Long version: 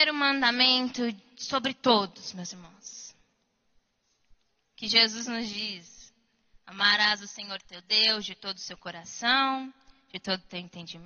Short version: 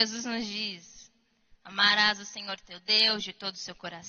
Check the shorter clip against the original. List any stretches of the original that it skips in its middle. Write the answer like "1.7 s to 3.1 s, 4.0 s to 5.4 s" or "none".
none